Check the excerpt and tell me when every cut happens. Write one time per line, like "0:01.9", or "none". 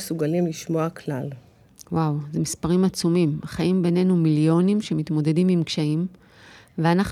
none